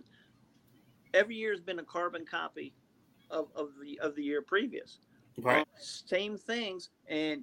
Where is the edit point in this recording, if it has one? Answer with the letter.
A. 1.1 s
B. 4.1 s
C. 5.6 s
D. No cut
C